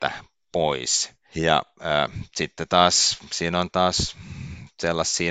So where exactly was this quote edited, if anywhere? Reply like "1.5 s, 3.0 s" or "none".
none